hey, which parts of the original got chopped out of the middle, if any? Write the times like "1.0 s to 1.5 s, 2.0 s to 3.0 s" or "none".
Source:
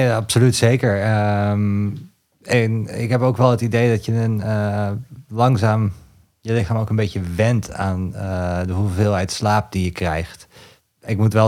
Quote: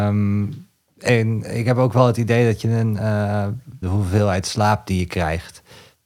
5.3 s to 8.7 s